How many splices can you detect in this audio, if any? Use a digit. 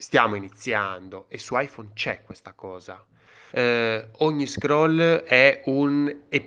1